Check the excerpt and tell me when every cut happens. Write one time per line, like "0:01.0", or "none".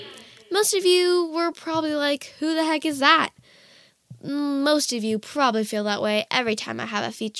none